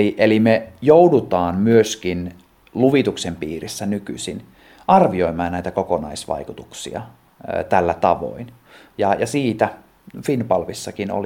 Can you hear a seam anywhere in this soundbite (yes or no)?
no